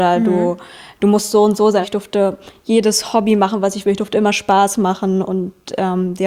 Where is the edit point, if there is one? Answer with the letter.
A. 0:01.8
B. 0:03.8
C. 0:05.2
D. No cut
A